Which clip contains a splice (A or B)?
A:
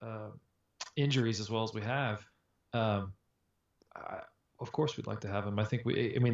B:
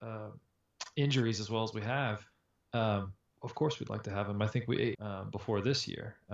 B